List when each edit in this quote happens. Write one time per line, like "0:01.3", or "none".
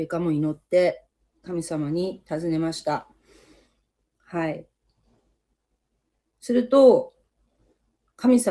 none